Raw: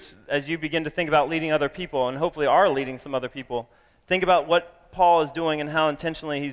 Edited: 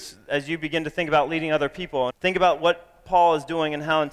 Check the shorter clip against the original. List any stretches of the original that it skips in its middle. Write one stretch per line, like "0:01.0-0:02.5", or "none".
0:02.1-0:04.0

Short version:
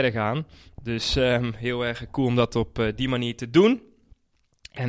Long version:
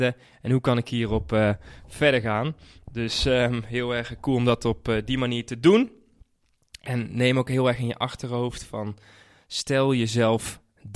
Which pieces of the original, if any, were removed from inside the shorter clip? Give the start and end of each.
none

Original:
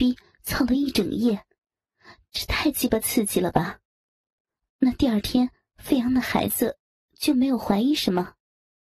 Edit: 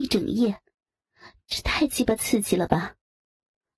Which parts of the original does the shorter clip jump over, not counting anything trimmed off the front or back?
none

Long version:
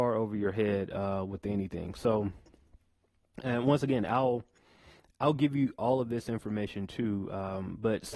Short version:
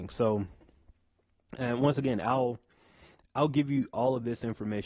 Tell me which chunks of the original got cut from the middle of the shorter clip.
none

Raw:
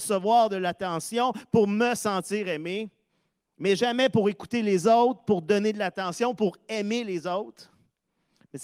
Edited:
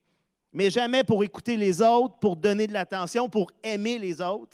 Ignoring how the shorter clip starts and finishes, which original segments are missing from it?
none

